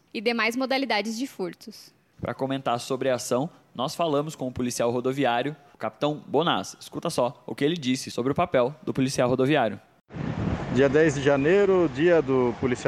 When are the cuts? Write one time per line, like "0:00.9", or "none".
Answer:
none